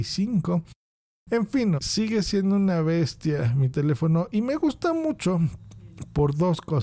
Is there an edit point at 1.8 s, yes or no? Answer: yes